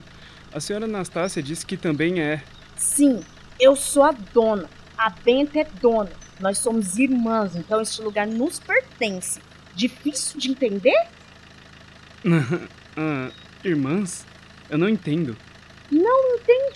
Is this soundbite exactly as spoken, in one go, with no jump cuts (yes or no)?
yes